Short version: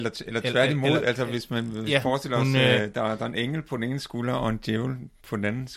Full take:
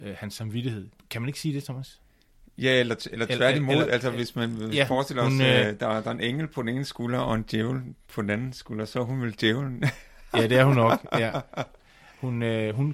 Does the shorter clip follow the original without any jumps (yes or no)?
yes